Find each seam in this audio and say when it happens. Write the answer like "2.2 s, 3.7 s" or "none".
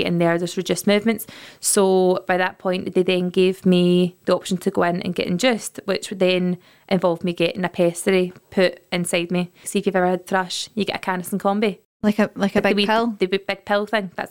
9.6 s, 11.9 s